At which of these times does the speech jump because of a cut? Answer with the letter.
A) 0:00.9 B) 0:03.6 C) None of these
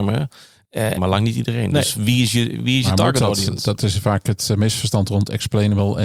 A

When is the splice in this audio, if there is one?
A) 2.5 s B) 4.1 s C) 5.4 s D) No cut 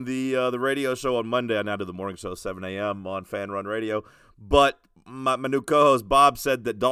D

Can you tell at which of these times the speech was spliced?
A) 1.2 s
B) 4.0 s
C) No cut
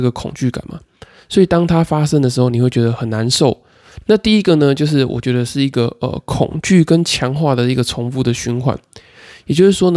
B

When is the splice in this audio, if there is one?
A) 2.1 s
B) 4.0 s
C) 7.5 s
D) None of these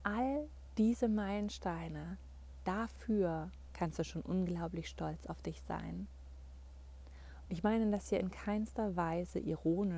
C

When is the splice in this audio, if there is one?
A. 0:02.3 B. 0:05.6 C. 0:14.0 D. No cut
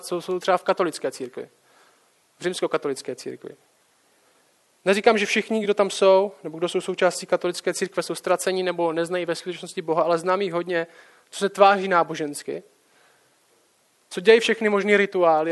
D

